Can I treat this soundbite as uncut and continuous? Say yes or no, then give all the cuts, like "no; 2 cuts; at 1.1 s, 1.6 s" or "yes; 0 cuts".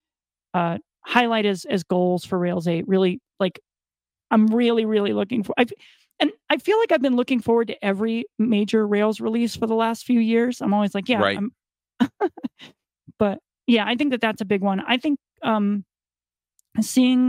yes; 0 cuts